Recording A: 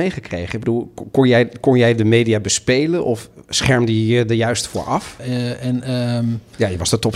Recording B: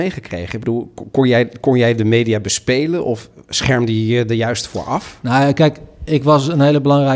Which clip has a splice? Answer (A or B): A